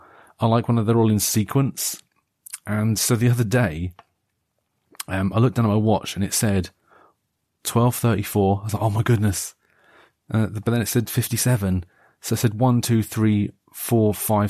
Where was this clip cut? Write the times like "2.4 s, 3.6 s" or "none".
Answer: none